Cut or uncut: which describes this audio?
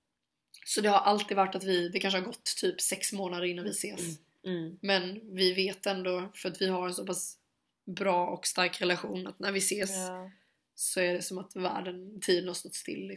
uncut